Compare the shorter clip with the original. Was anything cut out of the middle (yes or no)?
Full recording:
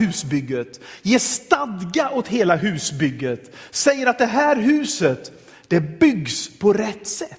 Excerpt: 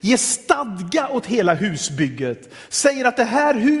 no